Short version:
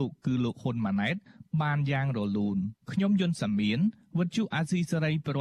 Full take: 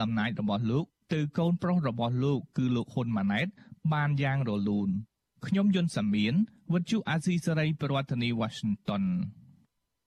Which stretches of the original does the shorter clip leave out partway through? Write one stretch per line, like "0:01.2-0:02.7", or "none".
0:05.1-0:05.4